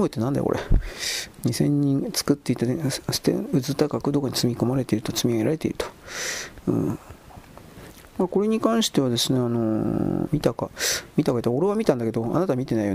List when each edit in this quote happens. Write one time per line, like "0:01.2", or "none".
0:10.3